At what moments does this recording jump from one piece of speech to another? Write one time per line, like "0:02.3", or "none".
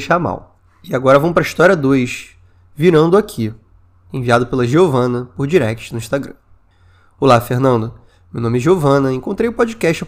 none